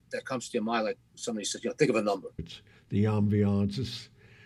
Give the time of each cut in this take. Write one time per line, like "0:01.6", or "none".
0:02.4